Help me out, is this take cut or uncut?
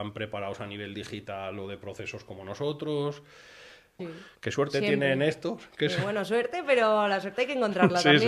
cut